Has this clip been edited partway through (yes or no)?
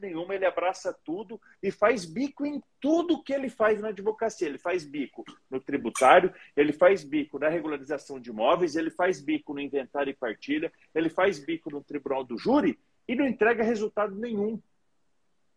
no